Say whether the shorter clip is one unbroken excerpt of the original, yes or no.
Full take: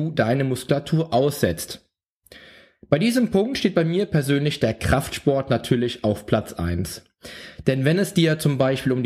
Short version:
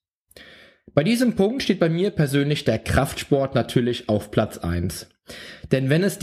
yes